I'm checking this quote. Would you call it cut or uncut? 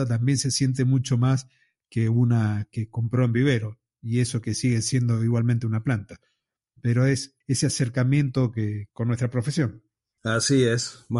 cut